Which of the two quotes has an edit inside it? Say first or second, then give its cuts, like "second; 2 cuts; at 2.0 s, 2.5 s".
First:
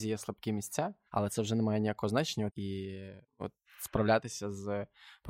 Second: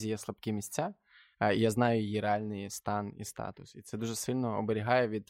first; 2 cuts; at 1.1 s, 2.5 s